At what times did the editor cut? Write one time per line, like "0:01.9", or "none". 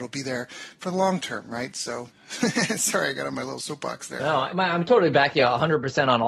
0:04.2